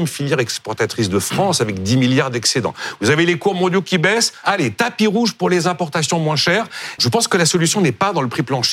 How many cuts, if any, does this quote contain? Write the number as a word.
two